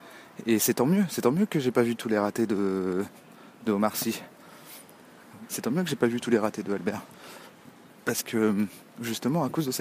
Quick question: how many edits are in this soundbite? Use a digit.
1